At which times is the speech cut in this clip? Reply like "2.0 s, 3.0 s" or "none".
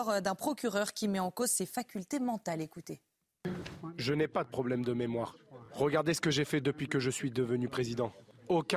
none